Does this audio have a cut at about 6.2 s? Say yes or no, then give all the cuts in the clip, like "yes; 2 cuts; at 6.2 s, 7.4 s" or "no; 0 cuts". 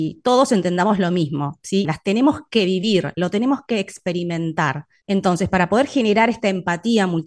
no; 2 cuts; at 1.8 s, 5.0 s